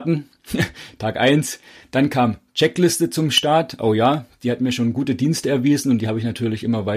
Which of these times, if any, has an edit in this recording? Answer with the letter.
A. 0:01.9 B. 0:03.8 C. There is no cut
C